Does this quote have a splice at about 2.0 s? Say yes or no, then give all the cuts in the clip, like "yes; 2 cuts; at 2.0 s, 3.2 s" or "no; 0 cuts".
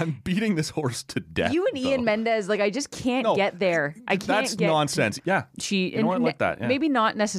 no; 1 cut; at 5.2 s